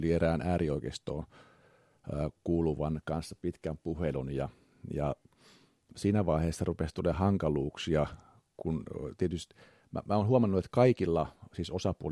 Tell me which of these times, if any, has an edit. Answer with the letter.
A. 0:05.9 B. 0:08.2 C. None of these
A